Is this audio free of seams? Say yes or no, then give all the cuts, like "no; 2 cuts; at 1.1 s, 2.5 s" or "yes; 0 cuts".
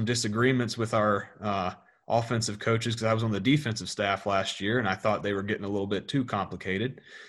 yes; 0 cuts